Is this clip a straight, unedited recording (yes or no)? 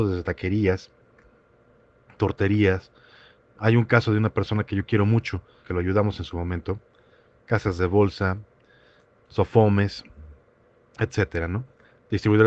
no